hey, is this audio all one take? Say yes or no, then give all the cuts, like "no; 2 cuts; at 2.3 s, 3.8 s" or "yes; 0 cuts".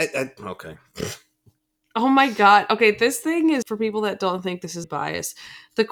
no; 2 cuts; at 3.6 s, 4.8 s